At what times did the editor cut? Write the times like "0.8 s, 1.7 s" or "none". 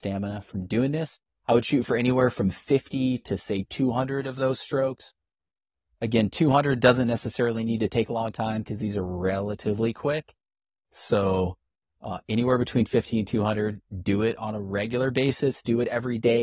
none